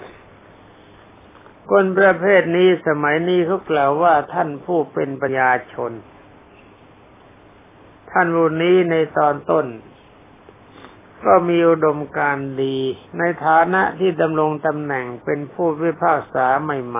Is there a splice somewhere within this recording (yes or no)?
yes